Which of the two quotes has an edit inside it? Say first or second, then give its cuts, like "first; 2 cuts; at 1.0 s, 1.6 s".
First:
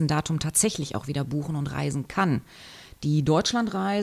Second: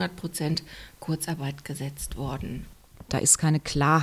second; 1 cut; at 3.1 s